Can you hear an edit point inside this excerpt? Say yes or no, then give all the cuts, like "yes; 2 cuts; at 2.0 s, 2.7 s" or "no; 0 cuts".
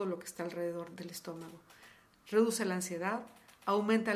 yes; 1 cut; at 0.9 s